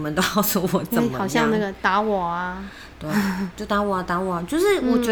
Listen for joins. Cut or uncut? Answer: uncut